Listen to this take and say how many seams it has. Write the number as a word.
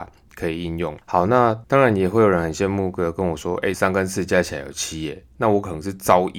two